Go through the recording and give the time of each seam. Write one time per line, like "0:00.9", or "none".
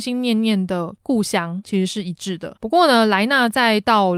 none

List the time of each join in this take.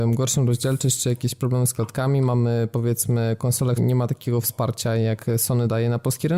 0:03.8

